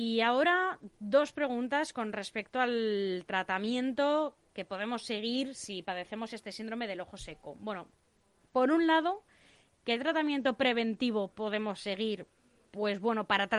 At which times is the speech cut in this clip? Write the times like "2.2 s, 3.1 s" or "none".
none

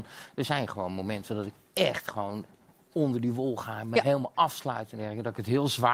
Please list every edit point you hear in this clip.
none

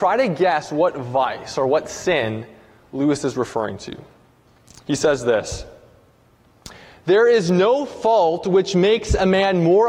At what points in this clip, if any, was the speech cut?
none

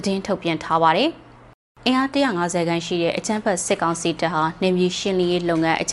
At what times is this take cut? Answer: none

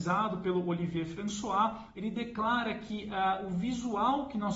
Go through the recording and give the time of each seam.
1.9 s

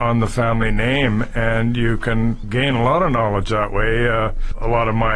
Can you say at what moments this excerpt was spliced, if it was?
none

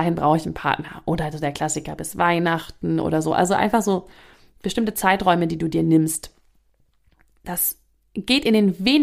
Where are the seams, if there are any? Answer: none

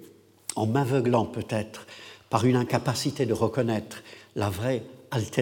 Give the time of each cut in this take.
none

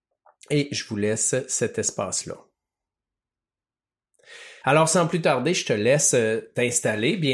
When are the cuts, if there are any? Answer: 4.6 s

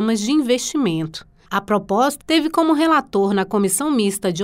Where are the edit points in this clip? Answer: 2.2 s

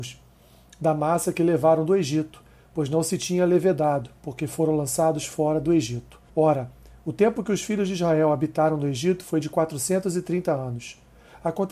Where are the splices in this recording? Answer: 6.3 s

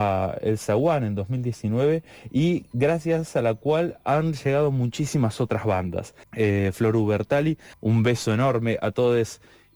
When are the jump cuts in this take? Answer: 6.2 s, 7.7 s

